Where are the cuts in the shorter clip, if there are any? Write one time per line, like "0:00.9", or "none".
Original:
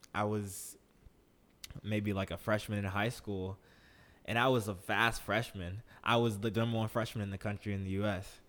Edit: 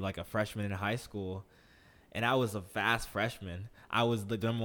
none